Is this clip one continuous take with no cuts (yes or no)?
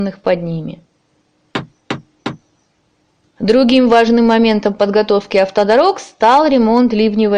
no